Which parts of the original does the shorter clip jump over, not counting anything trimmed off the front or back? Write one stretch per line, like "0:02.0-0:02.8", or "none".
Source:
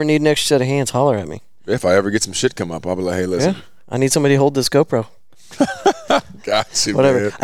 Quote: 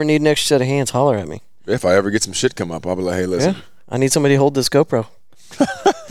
none